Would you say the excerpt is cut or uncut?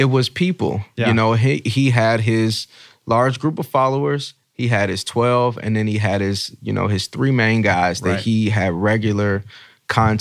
uncut